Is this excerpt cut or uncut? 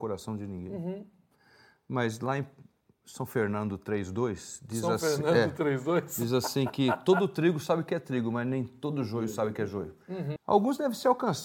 cut